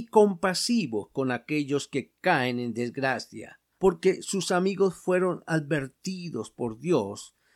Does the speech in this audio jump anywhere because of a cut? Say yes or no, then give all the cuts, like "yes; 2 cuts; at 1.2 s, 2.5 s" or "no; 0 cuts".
yes; 1 cut; at 3.8 s